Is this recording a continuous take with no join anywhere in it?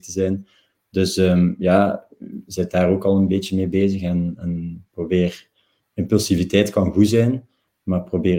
yes; 0 cuts

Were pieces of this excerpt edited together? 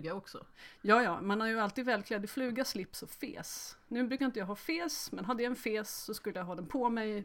no; 0 cuts

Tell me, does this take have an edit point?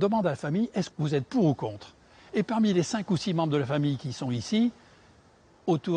yes; 1 cut; at 0.9 s

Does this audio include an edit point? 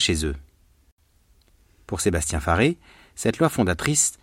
no; 0 cuts

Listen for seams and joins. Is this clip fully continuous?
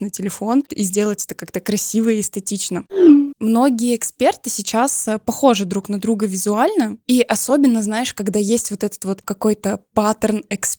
no; 1 cut; at 3.3 s

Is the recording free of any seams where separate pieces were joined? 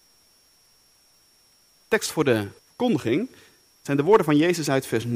no; 1 cut; at 2.6 s

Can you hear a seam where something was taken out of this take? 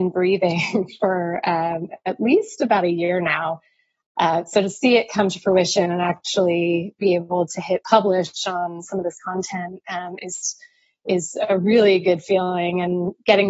no; 0 cuts

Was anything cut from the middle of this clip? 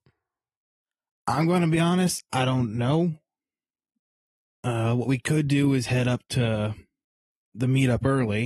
no; 0 cuts

